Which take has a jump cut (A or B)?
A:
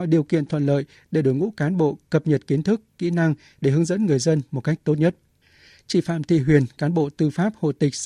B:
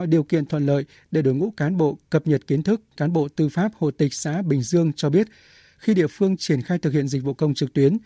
B